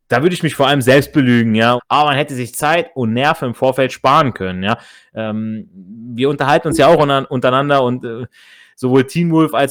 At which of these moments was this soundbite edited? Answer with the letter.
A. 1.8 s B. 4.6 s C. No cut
A